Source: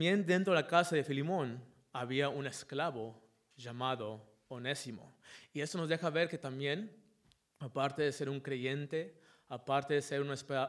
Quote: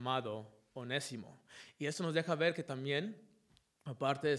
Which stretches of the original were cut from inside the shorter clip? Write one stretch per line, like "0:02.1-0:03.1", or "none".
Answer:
none